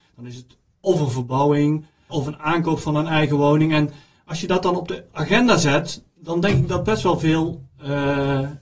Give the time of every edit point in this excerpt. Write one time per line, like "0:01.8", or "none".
0:02.1